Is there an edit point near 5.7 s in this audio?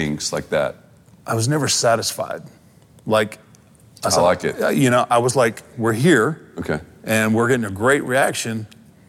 yes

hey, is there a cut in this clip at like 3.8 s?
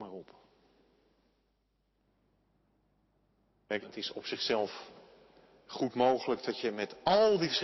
yes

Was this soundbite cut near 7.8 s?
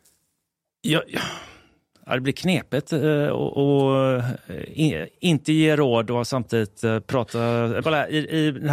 yes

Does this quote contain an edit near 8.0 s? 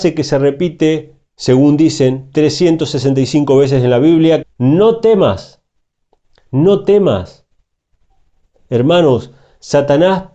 no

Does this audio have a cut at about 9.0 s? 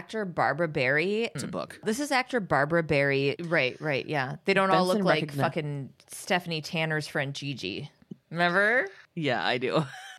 no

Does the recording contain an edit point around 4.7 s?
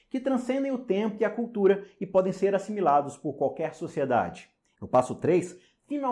yes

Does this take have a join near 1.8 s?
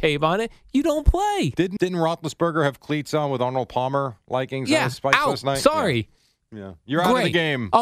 yes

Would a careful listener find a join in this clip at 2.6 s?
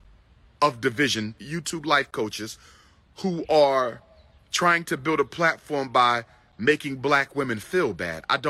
no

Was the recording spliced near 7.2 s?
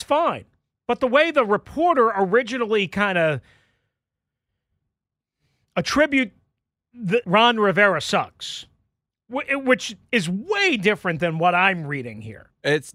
yes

